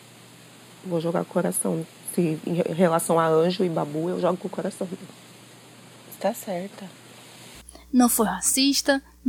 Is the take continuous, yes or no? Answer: yes